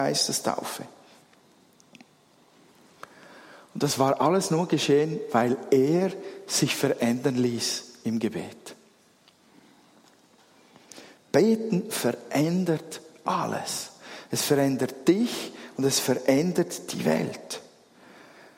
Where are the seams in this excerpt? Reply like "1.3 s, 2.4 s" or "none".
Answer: none